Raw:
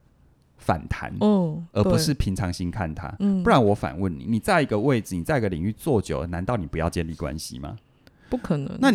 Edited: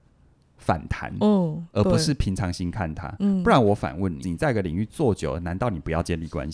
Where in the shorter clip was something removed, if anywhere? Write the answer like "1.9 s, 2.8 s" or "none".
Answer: 4.2 s